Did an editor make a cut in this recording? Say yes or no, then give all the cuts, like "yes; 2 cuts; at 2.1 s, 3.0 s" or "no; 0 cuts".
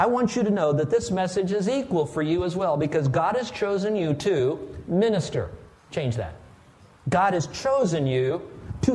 no; 0 cuts